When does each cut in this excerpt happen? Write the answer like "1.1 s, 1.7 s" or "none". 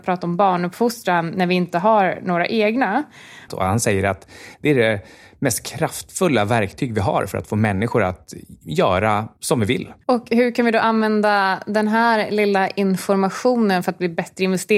3.5 s, 10.0 s